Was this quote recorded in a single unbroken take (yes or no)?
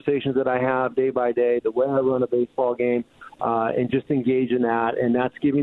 yes